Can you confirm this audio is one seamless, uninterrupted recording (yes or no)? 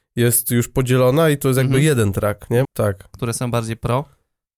no